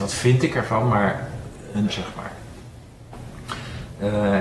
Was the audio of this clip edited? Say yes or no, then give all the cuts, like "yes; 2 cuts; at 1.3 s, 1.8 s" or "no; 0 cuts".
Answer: yes; 1 cut; at 1.9 s